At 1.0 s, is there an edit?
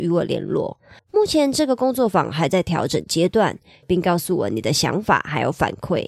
yes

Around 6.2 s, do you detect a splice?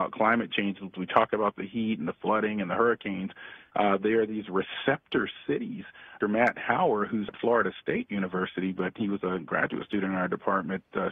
yes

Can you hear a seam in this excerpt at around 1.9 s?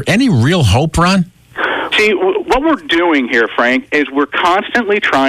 yes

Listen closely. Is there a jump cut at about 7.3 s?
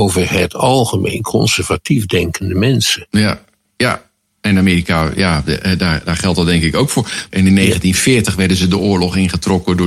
yes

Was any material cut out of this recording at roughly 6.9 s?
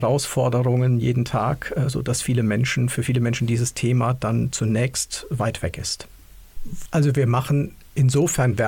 yes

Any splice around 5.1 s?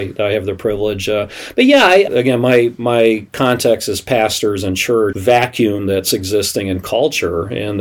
yes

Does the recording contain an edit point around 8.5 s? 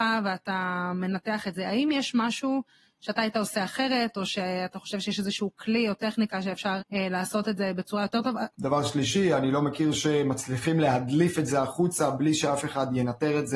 yes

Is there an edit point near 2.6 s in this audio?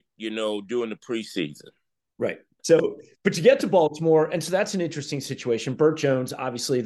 yes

